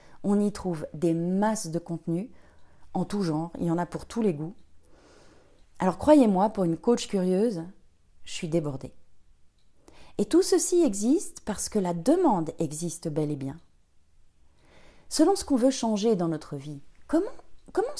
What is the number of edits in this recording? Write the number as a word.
zero